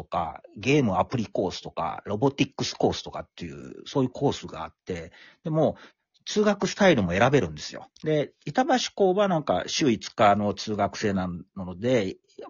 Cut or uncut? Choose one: cut